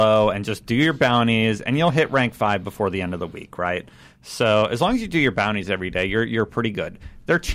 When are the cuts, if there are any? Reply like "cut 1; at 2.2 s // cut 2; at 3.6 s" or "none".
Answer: none